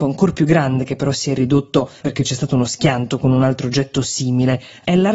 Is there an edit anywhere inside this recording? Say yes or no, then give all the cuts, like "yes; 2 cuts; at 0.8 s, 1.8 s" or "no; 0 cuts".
yes; 1 cut; at 2.0 s